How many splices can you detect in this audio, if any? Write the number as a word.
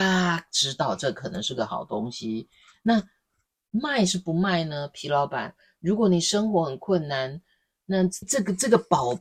one